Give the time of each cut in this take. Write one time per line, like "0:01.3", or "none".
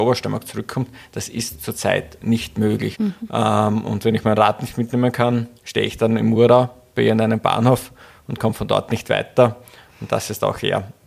0:02.9
0:05.6